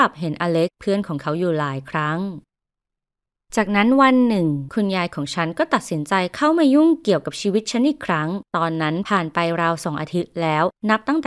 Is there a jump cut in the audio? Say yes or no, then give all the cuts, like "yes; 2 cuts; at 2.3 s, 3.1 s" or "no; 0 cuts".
no; 0 cuts